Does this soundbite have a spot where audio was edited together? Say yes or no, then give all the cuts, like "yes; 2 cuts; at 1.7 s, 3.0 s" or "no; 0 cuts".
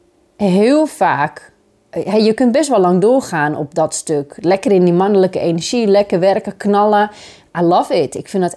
no; 0 cuts